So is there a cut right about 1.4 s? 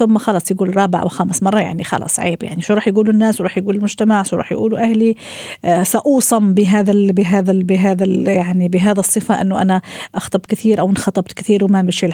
no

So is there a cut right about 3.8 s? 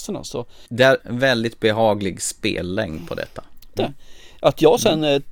yes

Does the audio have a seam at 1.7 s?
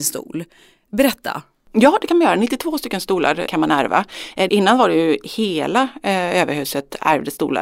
no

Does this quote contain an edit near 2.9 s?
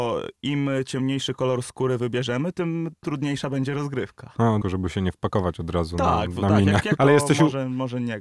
no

